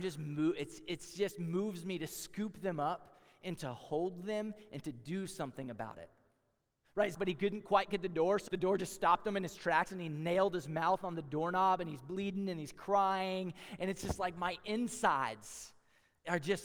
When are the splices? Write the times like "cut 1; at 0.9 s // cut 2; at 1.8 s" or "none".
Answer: cut 1; at 7.1 s // cut 2; at 8.5 s